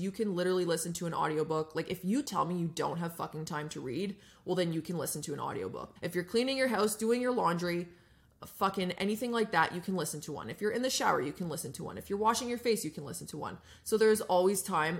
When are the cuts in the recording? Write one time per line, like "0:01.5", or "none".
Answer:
0:06.0